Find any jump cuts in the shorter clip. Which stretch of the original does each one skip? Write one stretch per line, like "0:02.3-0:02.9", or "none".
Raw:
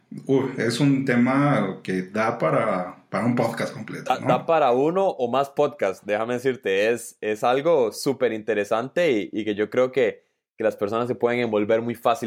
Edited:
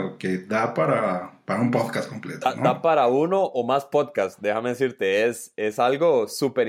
none